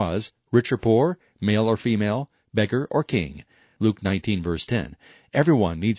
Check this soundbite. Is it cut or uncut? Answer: uncut